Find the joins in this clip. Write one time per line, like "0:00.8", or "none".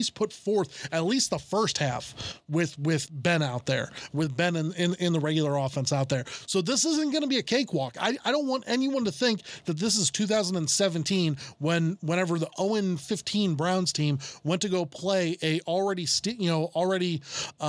none